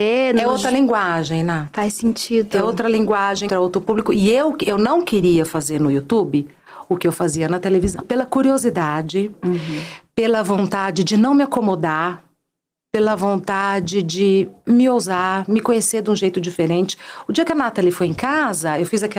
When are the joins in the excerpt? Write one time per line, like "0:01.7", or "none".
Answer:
0:03.5
0:08.0